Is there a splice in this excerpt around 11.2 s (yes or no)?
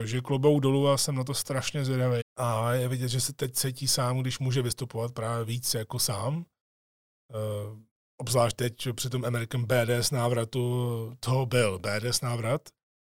no